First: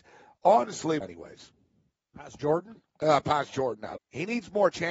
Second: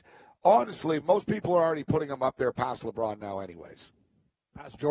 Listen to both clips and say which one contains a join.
first; 2 cuts; at 1.0 s, 4.0 s

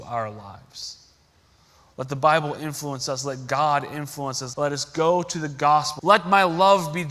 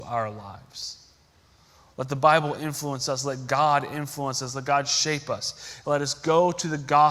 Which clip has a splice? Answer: first; 2 cuts; at 4.5 s, 6.0 s

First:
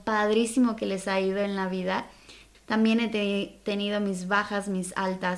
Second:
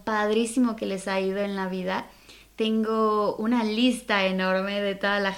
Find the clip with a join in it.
first; 1 cut; at 2.5 s

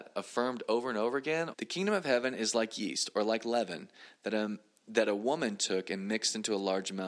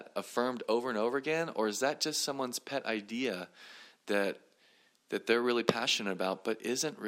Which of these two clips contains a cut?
first; 1 cut; at 1.5 s

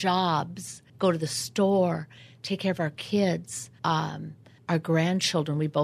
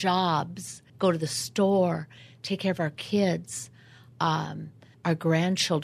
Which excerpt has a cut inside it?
first; 1 cut; at 3.8 s

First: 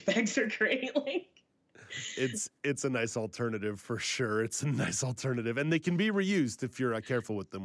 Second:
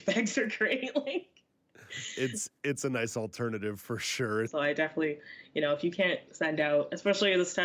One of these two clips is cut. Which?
second; 1 cut; at 4.5 s

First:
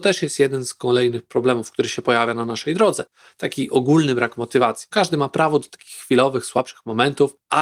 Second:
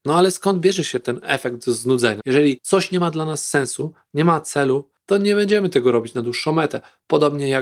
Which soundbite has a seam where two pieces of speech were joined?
second; 1 cut; at 2.2 s

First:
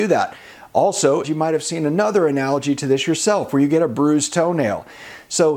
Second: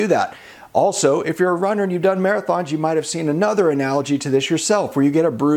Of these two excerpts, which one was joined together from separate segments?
first; 1 cut; at 1.2 s

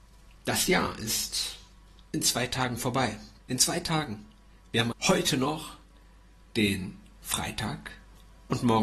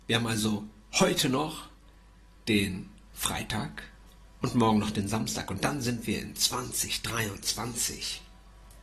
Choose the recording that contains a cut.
first; 2 cuts; at 3.4 s, 4.9 s

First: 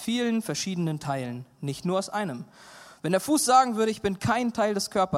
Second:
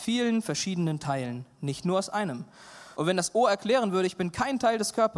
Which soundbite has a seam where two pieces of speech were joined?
second; 1 cut; at 3.0 s

